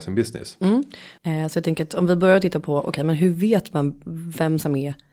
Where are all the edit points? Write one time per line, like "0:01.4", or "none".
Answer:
0:01.2